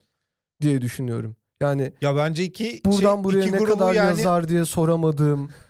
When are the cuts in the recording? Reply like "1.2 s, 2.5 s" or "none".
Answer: none